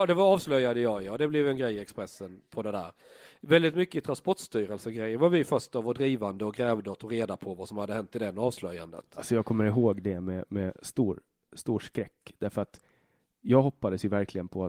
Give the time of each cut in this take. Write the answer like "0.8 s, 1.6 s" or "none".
none